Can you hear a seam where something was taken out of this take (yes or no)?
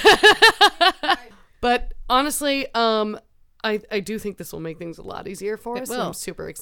no